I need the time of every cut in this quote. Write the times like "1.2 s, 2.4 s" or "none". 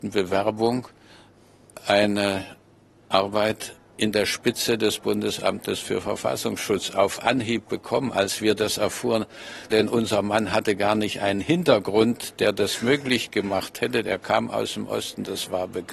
9.7 s